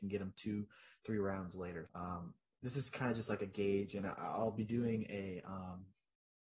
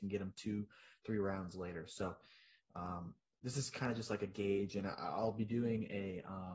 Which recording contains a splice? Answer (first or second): first